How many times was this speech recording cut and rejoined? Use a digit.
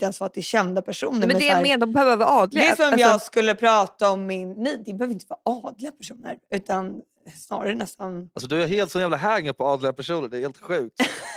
0